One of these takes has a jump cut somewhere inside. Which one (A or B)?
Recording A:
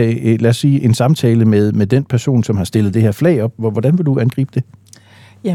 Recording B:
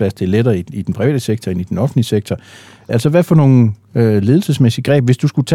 B